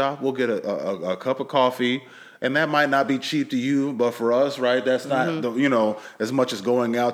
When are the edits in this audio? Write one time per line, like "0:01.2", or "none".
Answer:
none

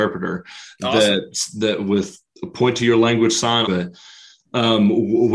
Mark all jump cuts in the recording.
0:03.6

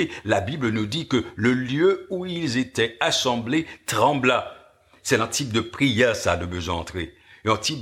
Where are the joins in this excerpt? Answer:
none

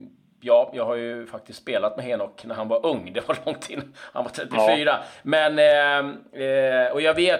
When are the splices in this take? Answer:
none

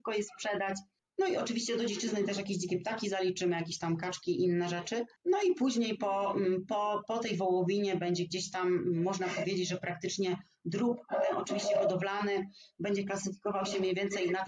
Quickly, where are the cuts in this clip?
0:01.0
0:05.2

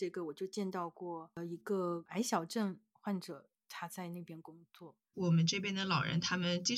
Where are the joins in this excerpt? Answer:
0:05.1

